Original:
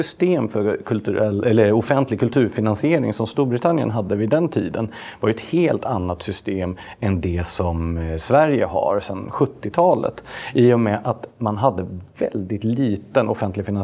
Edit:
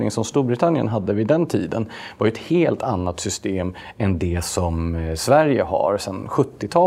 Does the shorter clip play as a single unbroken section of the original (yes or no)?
yes